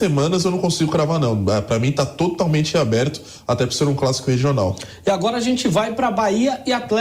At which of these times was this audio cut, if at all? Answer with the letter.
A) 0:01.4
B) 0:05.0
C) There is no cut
C